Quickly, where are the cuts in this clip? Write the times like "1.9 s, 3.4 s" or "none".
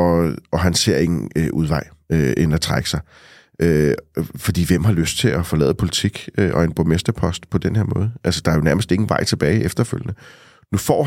none